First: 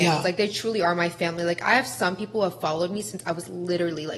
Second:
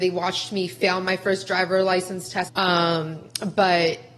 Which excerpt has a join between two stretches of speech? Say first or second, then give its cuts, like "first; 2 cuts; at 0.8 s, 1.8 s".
second; 1 cut; at 2.5 s